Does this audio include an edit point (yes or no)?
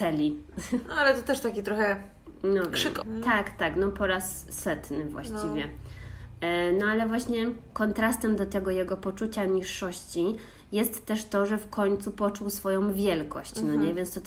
yes